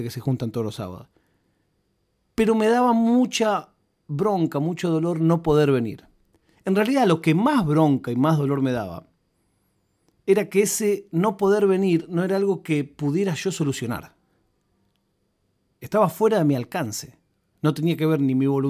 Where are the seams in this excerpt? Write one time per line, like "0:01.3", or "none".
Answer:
none